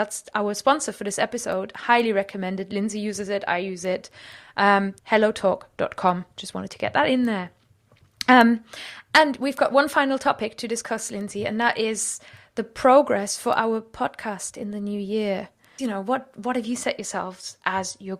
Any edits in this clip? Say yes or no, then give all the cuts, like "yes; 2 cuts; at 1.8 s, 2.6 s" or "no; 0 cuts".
yes; 2 cuts; at 5.0 s, 15.8 s